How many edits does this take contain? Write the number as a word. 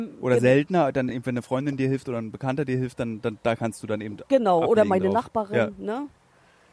zero